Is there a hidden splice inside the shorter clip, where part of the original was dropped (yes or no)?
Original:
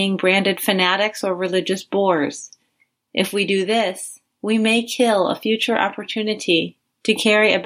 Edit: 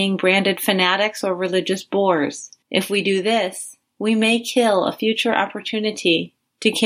yes